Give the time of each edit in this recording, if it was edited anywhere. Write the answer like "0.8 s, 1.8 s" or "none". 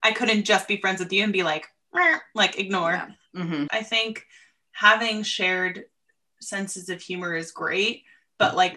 3.7 s